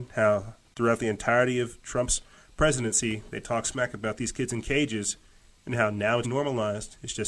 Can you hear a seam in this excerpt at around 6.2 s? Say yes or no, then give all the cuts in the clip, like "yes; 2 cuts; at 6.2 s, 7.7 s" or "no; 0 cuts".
yes; 1 cut; at 6.2 s